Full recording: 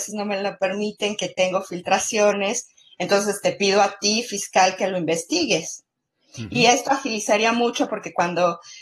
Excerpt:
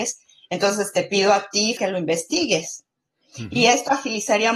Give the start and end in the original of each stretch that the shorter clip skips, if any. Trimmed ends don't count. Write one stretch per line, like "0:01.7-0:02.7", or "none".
0:04.3-0:04.8

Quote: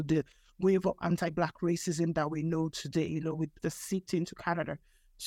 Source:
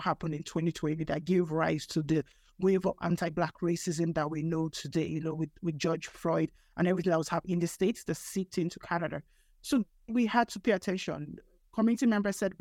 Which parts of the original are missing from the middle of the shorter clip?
0:05.6-0:08.0

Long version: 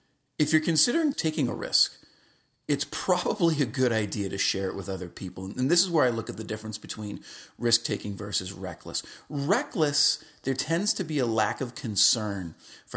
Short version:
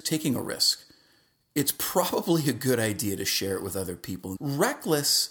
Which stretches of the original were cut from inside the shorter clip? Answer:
0:05.5-0:09.2

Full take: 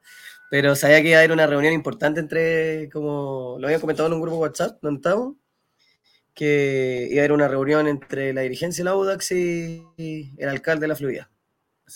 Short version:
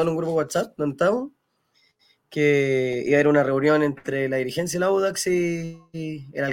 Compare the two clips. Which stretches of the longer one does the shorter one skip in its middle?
none

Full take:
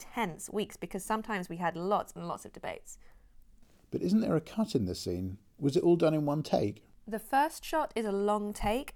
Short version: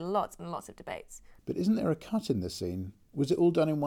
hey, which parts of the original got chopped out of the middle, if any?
0:03.2-0:03.8

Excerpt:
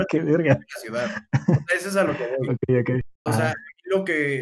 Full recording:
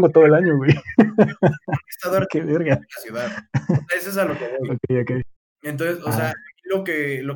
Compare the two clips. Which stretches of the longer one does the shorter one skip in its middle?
0:05.5-0:06.1

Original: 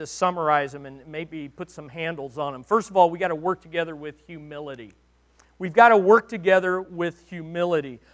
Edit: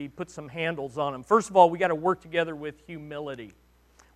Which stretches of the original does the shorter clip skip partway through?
none

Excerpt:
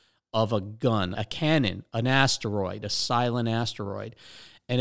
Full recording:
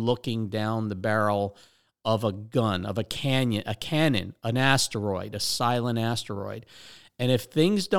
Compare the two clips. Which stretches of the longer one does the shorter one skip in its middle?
0:02.9-0:03.6

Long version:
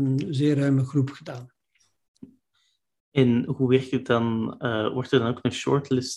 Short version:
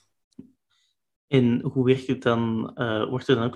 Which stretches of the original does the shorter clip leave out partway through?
none

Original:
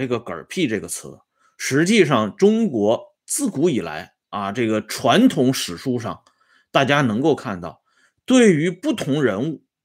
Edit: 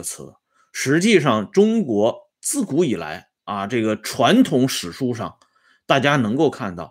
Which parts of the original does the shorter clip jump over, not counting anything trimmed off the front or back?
none

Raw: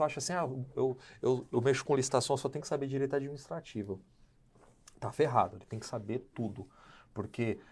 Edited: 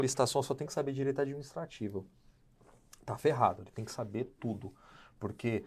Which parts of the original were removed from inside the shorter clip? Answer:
none

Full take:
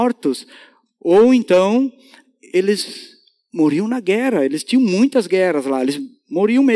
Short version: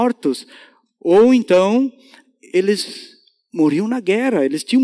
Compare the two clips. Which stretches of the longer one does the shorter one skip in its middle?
none

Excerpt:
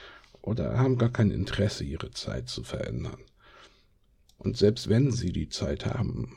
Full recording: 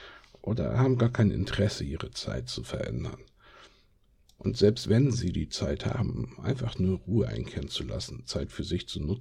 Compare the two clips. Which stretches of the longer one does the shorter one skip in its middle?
none

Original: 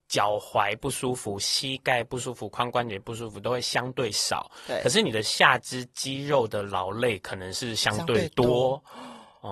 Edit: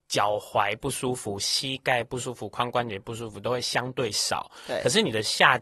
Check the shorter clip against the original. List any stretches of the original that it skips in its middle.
none

